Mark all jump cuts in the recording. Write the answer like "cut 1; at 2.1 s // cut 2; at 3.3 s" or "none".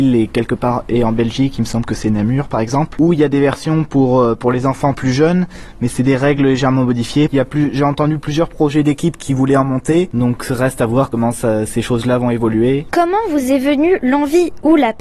cut 1; at 7.3 s